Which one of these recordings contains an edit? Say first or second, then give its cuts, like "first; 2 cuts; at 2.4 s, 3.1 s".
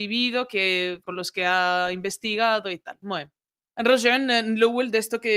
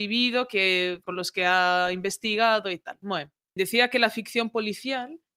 second; 1 cut; at 3.6 s